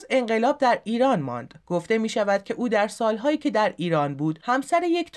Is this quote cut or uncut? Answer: uncut